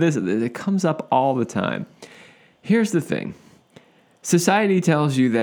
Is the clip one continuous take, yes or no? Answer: yes